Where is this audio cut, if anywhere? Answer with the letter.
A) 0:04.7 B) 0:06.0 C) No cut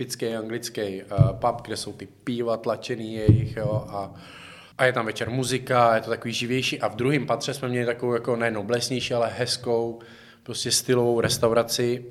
A